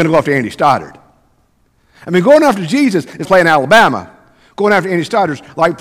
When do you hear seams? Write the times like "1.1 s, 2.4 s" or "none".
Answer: 3.3 s